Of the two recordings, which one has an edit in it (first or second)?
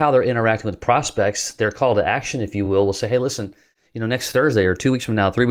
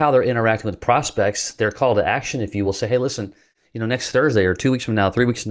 second